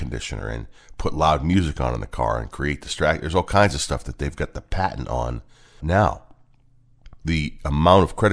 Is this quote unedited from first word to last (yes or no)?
no